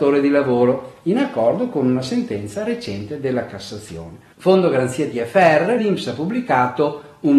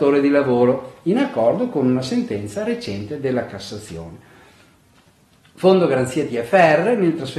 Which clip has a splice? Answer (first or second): first